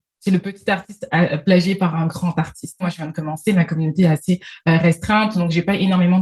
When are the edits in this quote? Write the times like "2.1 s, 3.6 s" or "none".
2.8 s